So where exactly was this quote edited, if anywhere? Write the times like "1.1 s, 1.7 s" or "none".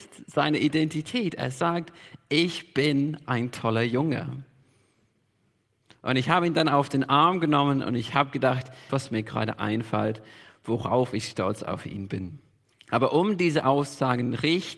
8.9 s, 12.7 s